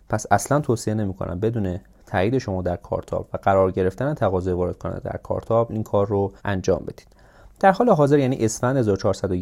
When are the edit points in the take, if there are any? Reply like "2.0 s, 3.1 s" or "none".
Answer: 6.4 s

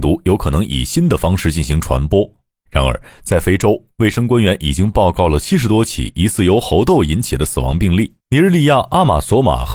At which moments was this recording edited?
2.7 s, 8.2 s

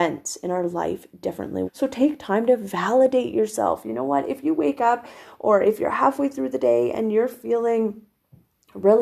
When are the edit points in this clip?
1.7 s

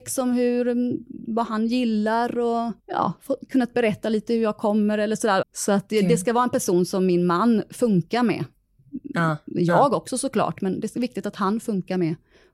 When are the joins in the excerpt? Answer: 2.8 s, 5.4 s

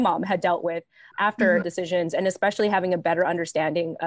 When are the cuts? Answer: 1.6 s

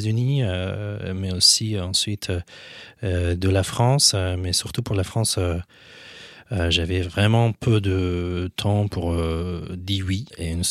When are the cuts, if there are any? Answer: none

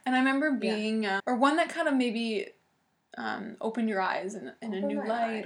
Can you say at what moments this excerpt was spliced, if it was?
1.2 s

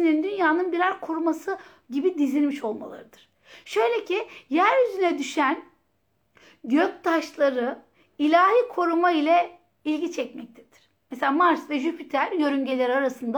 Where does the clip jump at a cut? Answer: none

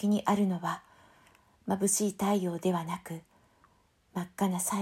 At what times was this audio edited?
none

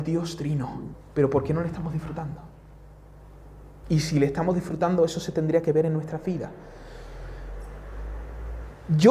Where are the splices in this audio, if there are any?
0.9 s, 3.8 s

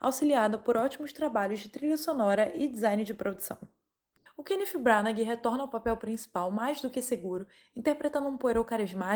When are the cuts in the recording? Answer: 4.3 s

